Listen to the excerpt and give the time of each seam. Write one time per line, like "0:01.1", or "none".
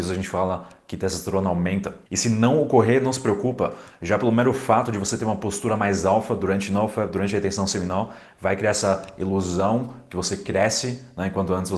0:02.1

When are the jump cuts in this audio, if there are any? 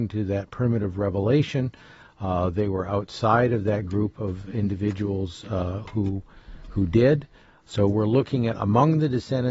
0:07.6

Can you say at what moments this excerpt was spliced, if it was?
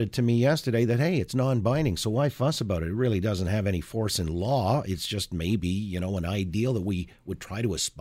none

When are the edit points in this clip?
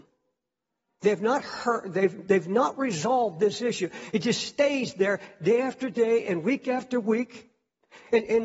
none

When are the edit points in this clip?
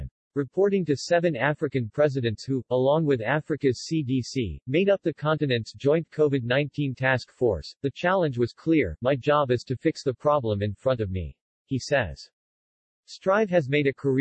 0:11.6

